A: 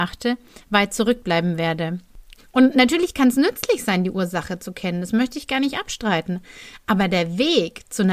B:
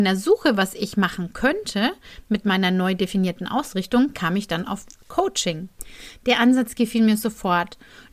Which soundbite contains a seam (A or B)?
A